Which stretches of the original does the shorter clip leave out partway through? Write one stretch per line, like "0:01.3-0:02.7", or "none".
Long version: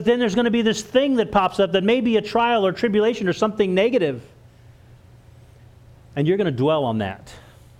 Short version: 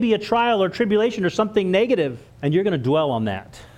0:04.3-0:06.0